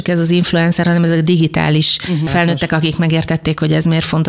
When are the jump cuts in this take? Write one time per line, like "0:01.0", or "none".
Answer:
0:02.3

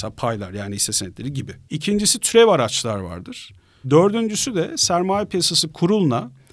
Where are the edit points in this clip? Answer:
0:03.8

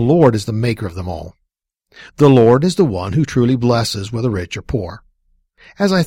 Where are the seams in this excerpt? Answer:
none

